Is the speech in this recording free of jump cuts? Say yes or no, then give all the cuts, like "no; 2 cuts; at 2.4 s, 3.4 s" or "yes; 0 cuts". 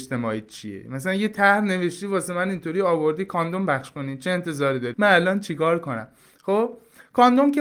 no; 1 cut; at 4.9 s